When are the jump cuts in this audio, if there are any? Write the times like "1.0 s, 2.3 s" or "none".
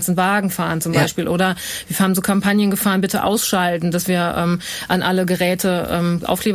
none